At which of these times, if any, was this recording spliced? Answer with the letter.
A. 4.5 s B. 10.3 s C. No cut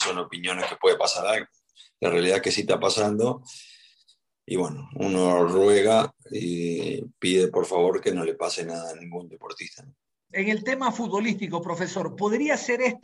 B